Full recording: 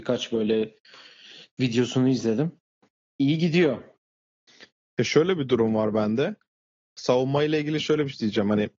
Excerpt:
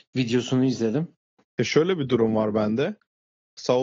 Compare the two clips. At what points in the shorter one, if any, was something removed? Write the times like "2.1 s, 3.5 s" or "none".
1.4 s